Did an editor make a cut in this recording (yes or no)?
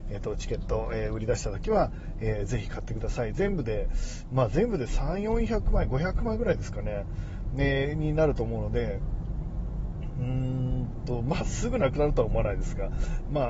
no